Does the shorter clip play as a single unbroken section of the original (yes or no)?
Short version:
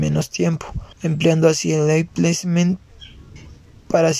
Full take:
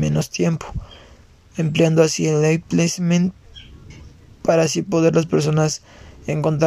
no